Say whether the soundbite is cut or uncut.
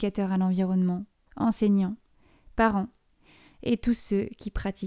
cut